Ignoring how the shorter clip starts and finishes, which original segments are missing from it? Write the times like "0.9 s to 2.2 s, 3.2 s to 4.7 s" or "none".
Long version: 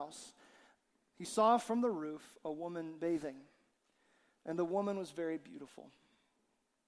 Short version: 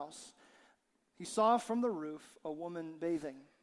none